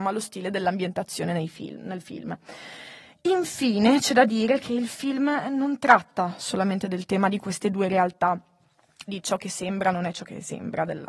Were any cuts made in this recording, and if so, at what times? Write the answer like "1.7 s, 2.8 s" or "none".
9.1 s